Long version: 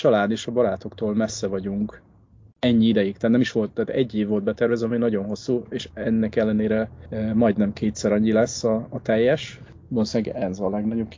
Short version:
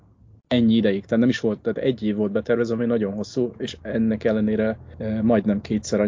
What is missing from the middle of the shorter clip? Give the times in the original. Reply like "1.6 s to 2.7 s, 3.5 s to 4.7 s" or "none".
none

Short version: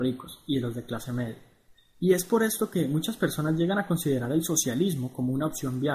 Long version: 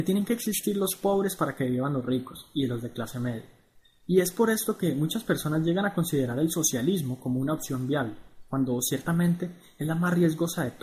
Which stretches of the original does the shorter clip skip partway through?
none

